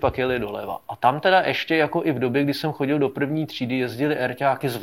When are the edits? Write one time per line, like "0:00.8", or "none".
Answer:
none

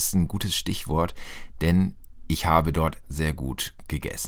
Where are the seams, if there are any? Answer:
0:03.0

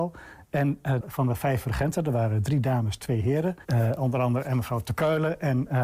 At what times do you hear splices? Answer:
0:01.0
0:03.6

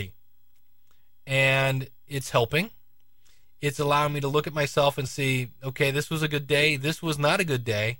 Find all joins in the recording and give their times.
none

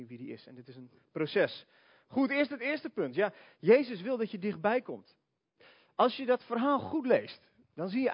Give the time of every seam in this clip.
none

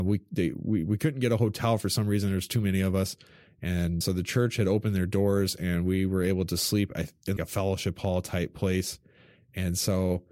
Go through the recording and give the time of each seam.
0:04.0
0:07.4

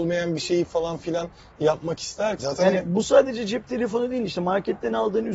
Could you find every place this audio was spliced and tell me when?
0:02.4

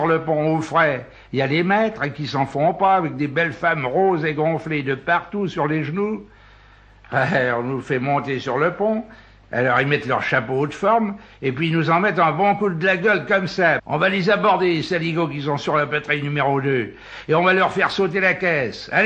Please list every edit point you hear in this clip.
0:13.8

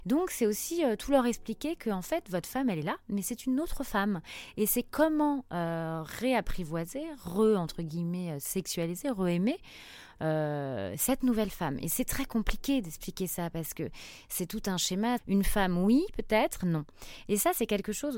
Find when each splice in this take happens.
0:15.2
0:16.6

